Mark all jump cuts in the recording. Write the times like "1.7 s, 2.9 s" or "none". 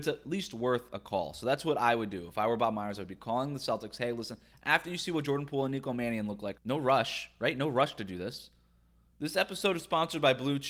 6.5 s, 9.1 s